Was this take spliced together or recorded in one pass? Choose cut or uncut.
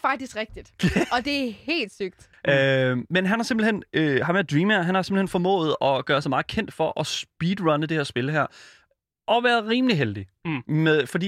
cut